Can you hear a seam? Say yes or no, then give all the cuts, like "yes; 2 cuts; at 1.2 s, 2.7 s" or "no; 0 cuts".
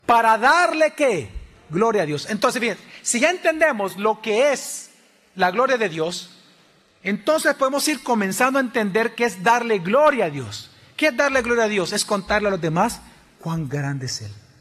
no; 0 cuts